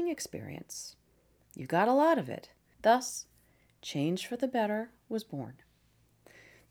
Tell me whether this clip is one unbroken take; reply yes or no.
no